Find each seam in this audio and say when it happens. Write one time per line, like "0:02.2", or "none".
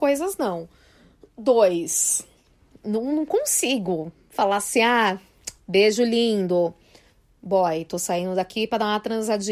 none